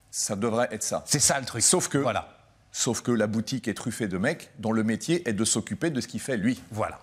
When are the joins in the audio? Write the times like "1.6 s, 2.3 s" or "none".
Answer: none